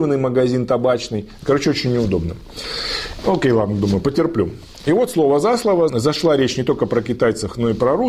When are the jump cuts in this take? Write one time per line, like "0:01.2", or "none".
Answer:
0:01.4
0:05.9